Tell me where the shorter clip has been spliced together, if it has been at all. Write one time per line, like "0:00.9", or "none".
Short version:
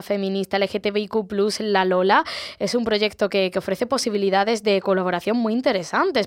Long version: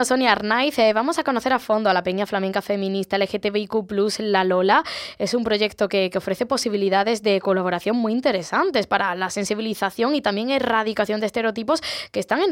none